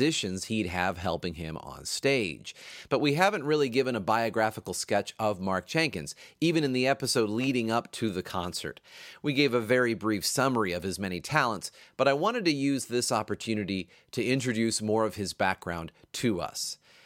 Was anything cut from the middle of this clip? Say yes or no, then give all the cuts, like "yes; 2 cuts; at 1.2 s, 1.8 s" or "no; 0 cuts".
no; 0 cuts